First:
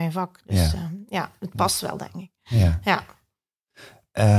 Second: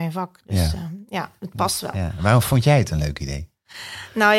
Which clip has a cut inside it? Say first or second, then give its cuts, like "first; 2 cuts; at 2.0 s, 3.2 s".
second; 1 cut; at 1.9 s